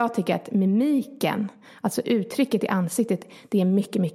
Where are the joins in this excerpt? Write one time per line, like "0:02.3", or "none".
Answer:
none